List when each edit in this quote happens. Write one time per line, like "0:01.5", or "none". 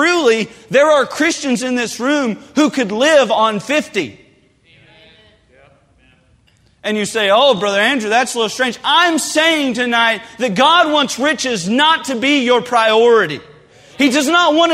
none

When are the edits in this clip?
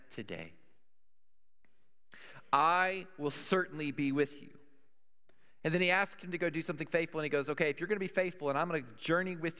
0:05.6

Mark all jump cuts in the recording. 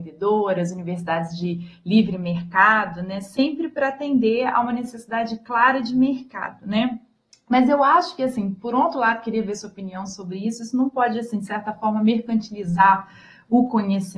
none

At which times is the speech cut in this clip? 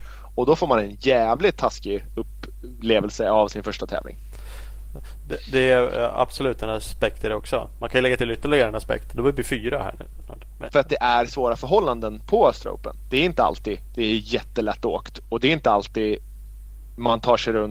0:10.7

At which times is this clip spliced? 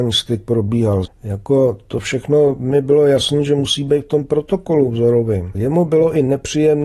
0:01.0
0:05.5

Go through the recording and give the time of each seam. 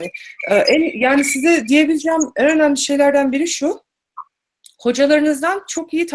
none

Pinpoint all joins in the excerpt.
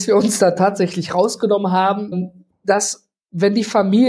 0:02.1

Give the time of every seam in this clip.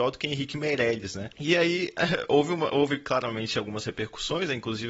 0:01.3

